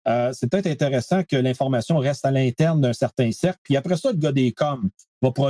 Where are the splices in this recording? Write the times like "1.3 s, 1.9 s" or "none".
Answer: none